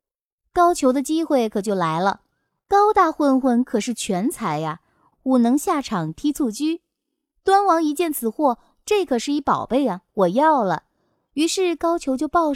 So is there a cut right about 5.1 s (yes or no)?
yes